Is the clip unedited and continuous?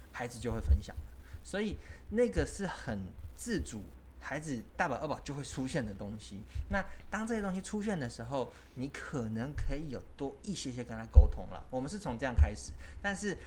yes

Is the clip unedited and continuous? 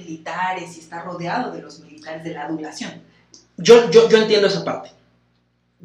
yes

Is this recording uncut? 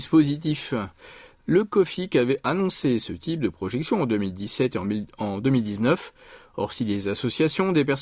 yes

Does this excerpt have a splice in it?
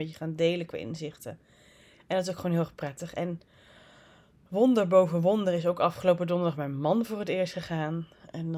no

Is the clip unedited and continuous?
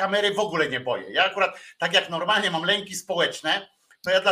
yes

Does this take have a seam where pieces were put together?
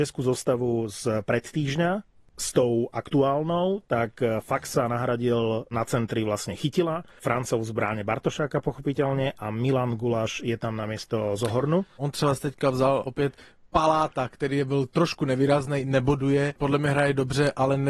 no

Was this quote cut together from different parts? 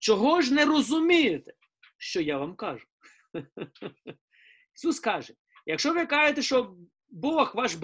no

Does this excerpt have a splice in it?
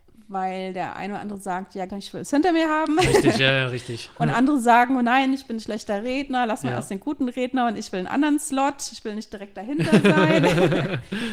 yes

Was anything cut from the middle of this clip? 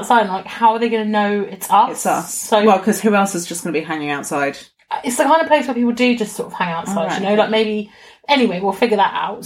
no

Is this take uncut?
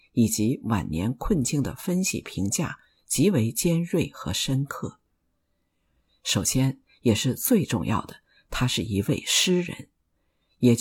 yes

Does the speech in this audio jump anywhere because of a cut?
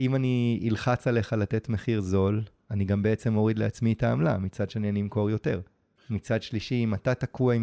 yes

